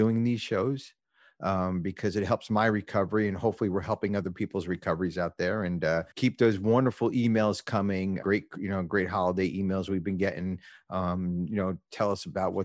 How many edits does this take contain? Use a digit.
2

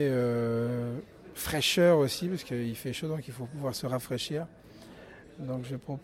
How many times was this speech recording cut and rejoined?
0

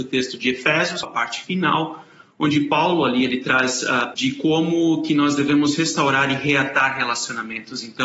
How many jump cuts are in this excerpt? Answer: 2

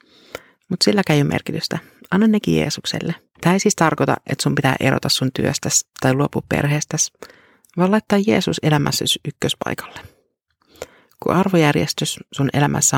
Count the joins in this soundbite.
1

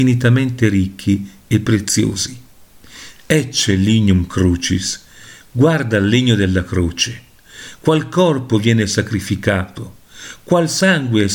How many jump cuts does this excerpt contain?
1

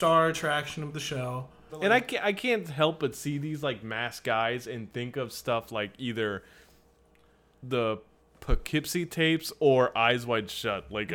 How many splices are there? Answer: 1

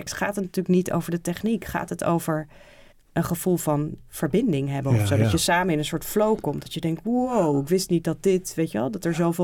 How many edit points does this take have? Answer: 1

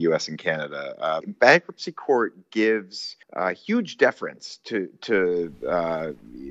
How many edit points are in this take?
2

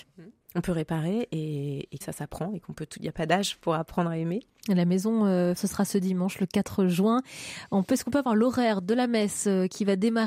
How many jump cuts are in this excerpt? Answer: 3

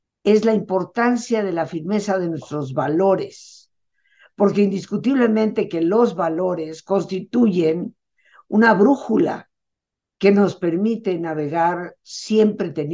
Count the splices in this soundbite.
0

